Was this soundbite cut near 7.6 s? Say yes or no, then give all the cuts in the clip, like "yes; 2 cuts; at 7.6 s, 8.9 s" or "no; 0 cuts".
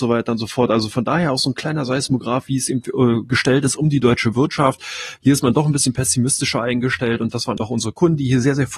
yes; 2 cuts; at 5.2 s, 7.6 s